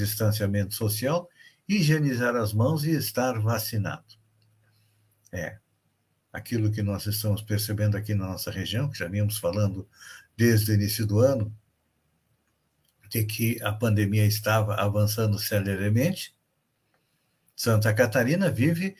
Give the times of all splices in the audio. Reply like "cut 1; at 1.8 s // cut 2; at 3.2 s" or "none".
none